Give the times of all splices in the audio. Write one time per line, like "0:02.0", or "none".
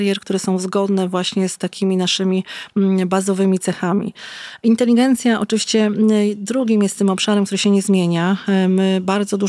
none